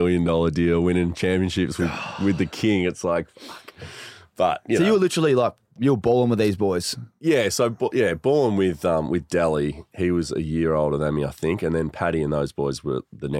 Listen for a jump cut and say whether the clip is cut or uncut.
uncut